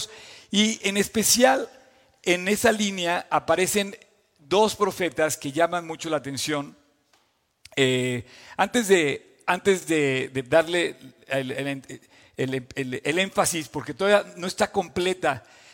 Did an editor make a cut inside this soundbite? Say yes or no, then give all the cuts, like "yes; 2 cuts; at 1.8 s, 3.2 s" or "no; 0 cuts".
no; 0 cuts